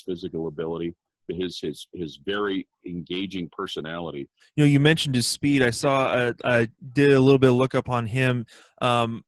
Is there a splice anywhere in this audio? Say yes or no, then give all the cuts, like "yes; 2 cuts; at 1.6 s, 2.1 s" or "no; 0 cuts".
yes; 1 cut; at 4.4 s